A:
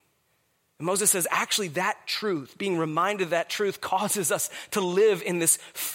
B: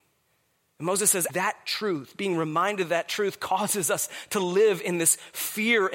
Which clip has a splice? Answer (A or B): B